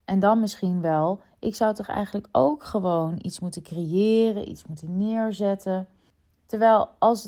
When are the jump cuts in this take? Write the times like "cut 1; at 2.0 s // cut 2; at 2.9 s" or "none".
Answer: none